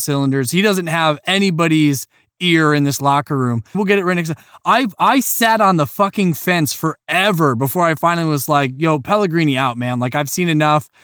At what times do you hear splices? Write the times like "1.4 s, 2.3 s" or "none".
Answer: 3.7 s